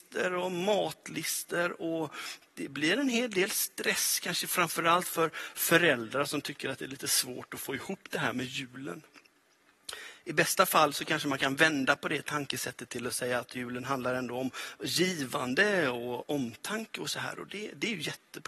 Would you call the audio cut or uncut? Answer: uncut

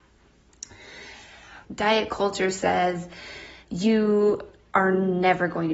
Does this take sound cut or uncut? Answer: cut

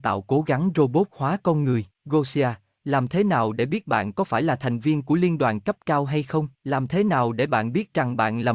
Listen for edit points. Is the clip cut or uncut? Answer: cut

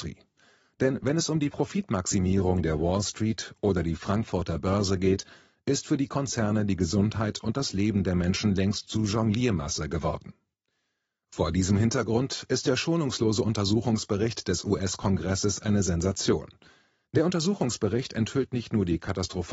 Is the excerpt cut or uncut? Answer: cut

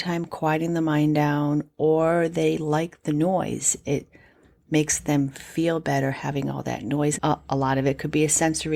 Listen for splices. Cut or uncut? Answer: cut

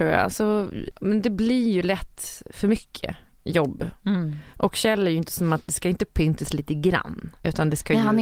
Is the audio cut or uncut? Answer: cut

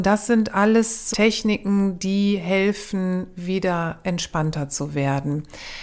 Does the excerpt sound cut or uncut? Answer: cut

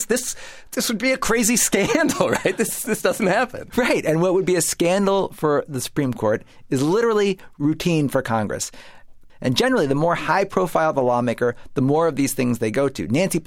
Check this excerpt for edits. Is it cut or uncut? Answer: cut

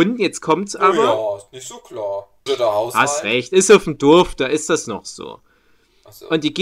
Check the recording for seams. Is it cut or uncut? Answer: cut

